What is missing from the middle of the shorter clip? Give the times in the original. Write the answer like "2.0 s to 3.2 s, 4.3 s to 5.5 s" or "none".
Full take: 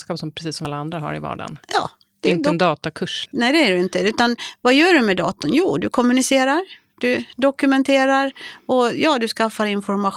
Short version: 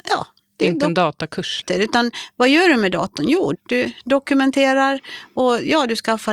3.3 s to 3.9 s, 5.8 s to 6.9 s